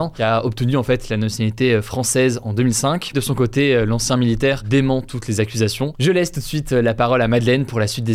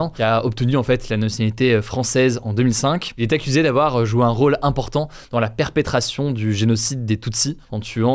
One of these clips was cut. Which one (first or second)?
first